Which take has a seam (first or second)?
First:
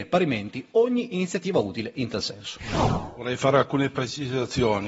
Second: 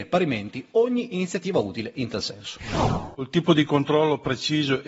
second